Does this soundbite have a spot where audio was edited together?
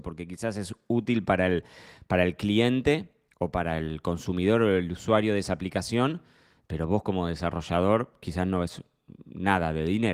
no; 0 cuts

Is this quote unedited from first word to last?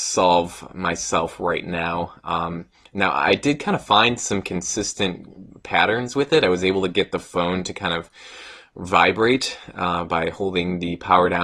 yes; 0 cuts

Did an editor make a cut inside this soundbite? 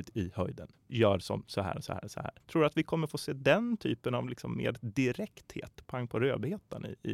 no; 0 cuts

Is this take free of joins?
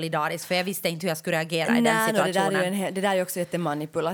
yes; 0 cuts

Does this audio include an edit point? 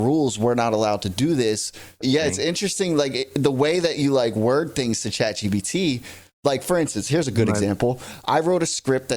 yes; 1 cut; at 2.0 s

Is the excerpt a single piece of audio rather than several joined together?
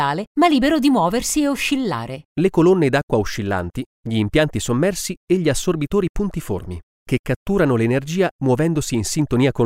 no; 1 cut; at 2.3 s

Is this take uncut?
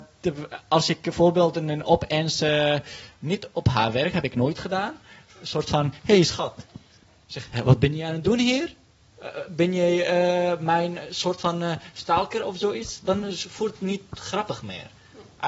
yes; 0 cuts

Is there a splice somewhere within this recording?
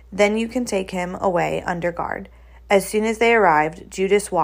no; 0 cuts

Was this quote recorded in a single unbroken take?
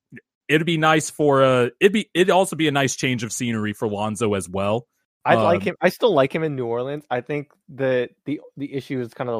yes; 0 cuts

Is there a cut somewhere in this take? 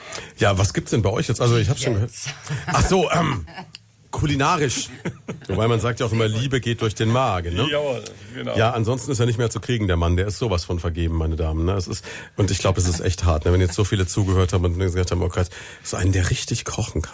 no; 0 cuts

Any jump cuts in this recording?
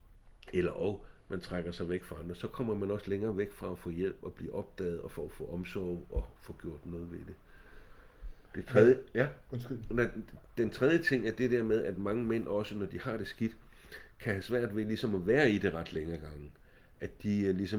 no; 0 cuts

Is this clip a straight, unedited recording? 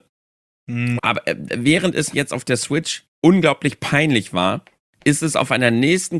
no; 2 cuts; at 1.0 s, 2.1 s

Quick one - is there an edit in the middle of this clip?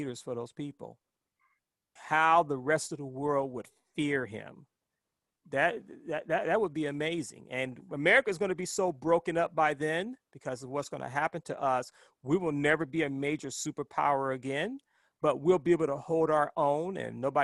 yes; 1 cut; at 2.0 s

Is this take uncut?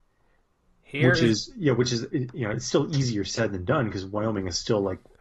yes; 0 cuts

